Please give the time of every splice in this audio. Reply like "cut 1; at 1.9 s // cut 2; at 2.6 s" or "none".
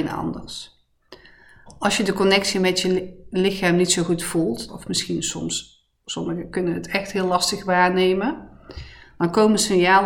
cut 1; at 4.7 s